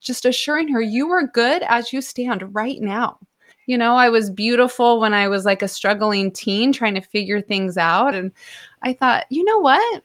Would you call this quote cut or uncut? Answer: cut